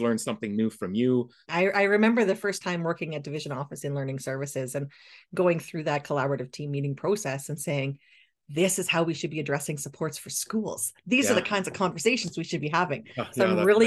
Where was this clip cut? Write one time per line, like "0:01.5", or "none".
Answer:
0:01.4